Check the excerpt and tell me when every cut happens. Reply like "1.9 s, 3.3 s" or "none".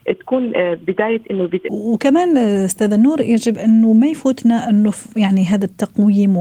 1.7 s